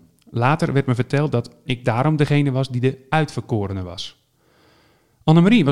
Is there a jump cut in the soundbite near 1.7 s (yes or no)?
yes